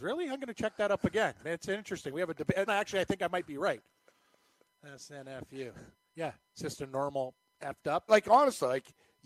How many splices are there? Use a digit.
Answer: 3